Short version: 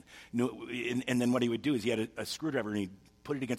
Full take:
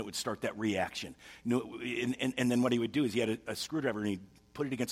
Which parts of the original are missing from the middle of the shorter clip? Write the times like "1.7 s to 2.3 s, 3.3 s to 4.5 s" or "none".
2.2 s to 2.3 s